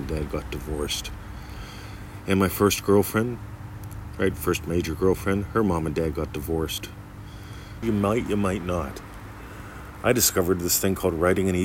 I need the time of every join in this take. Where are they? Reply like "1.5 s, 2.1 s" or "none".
7.8 s